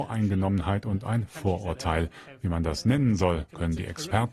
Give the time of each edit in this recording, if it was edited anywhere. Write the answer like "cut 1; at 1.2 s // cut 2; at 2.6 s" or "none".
none